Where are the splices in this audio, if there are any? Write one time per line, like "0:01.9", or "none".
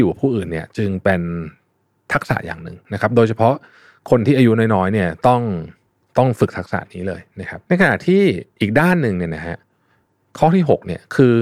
0:07.6